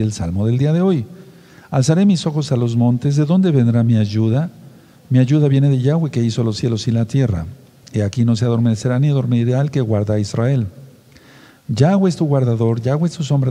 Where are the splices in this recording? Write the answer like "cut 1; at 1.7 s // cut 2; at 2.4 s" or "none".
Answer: cut 1; at 7.8 s